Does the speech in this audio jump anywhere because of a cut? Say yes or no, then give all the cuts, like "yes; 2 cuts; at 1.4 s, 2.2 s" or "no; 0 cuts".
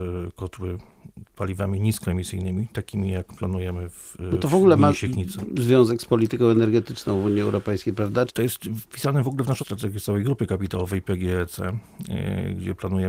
yes; 2 cuts; at 8.3 s, 9.6 s